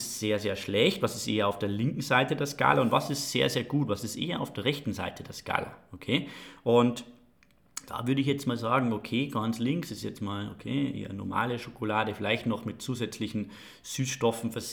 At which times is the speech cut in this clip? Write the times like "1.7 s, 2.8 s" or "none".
none